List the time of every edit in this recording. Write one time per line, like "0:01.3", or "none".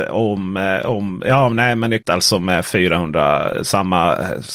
0:02.0